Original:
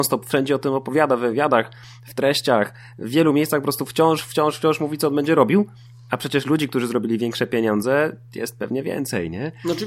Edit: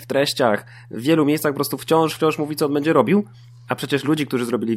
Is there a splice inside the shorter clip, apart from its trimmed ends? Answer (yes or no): yes